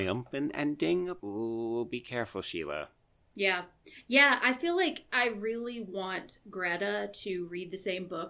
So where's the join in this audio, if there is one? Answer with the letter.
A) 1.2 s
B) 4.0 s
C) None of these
A